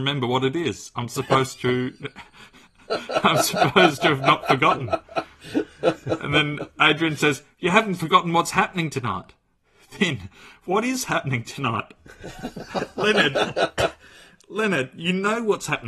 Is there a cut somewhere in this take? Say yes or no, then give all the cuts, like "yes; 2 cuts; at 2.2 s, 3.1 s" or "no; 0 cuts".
no; 0 cuts